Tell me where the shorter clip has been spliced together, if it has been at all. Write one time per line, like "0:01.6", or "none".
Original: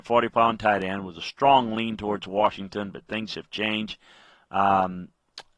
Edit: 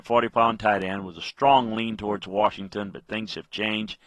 none